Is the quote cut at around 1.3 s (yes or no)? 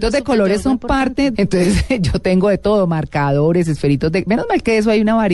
yes